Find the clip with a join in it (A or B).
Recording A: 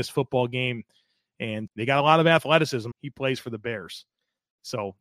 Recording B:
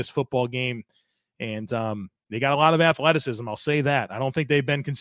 A